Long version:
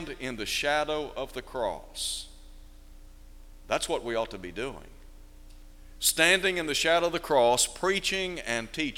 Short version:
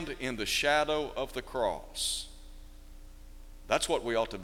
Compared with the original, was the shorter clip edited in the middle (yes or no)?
no